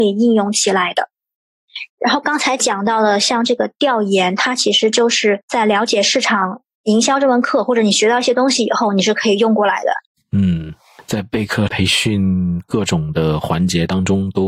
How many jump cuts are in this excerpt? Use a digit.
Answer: 2